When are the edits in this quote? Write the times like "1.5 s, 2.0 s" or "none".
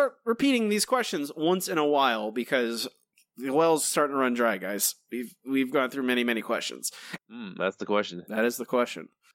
7.2 s